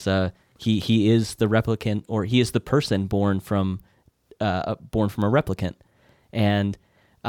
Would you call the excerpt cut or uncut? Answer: uncut